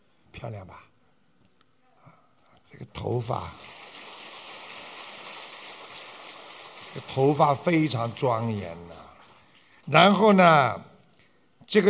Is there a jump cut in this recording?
yes; 1 cut; at 9.8 s

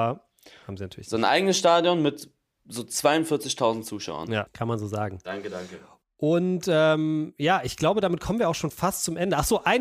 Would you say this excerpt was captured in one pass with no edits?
no; 1 cut; at 4.5 s

